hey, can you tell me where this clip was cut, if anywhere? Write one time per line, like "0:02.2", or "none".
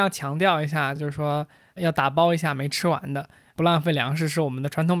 none